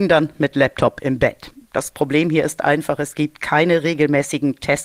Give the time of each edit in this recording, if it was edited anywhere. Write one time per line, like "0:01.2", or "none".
none